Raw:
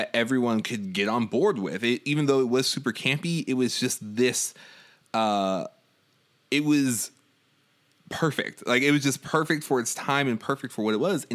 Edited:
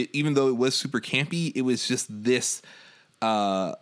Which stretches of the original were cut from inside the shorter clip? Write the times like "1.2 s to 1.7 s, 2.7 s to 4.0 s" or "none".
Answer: none